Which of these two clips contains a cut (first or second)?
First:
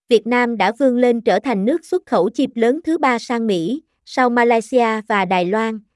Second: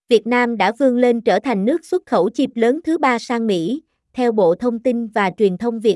second